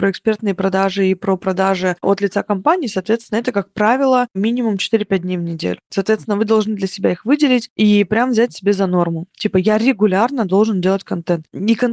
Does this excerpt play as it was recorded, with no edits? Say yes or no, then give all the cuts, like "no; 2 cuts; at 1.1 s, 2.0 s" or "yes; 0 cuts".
yes; 0 cuts